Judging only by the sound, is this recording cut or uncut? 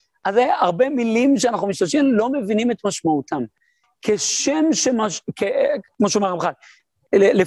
uncut